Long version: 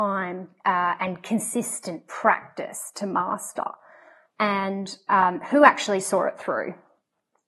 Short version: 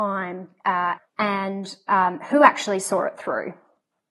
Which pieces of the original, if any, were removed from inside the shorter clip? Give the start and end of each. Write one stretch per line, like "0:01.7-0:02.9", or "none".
0:01.0-0:04.2